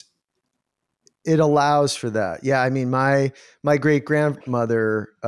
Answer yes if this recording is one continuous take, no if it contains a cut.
yes